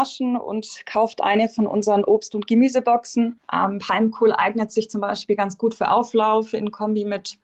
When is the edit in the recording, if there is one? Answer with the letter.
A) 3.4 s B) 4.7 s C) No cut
A